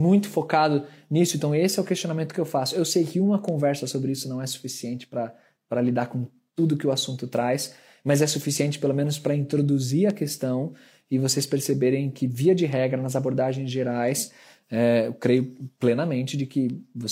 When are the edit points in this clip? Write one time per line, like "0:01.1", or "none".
none